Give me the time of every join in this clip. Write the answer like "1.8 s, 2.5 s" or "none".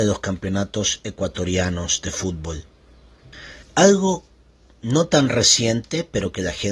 3.6 s